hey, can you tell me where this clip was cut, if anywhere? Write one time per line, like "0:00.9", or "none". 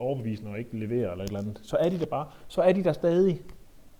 none